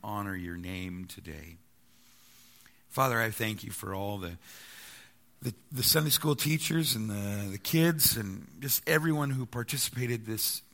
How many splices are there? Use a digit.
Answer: 0